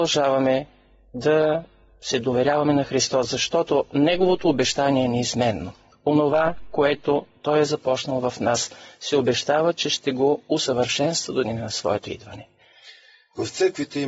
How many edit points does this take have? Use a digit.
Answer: 0